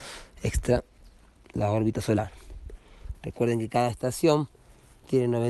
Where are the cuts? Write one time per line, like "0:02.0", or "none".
0:03.1